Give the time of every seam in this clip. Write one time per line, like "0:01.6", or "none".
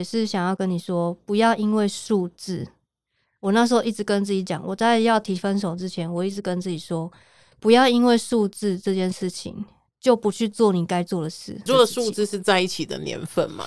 0:11.7